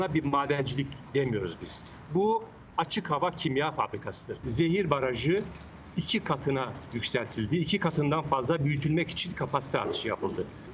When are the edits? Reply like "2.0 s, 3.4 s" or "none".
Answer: none